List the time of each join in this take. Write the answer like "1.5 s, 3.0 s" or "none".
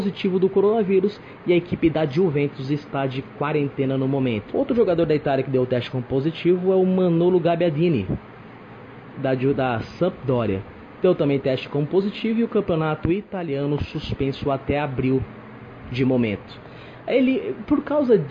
4.5 s